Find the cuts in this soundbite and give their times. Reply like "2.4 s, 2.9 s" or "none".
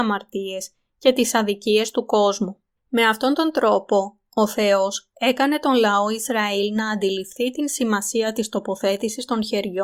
2.8 s